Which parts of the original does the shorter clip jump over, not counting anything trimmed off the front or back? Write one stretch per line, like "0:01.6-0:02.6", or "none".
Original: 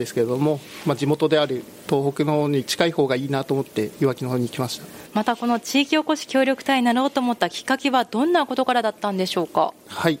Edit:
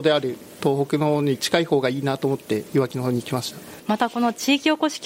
none